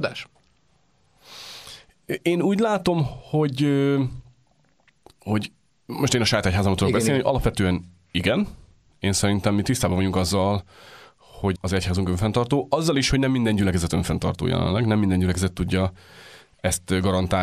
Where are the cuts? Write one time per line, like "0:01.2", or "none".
0:11.6